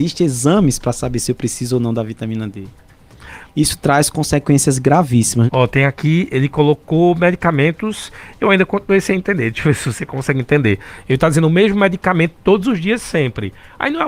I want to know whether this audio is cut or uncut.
cut